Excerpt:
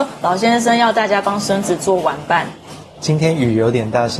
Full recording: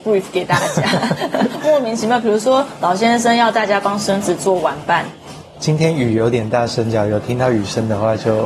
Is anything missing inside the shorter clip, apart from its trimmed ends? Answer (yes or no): no